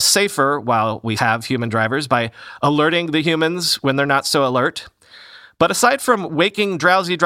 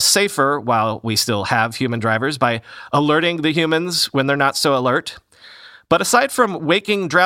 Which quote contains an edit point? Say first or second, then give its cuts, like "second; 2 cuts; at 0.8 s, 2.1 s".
first; 1 cut; at 1.2 s